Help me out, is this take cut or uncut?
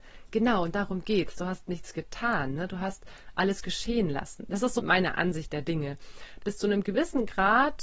cut